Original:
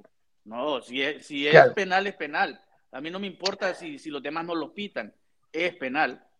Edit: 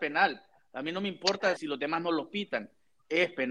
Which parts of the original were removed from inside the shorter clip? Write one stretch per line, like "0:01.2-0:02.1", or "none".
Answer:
0:03.7-0:04.0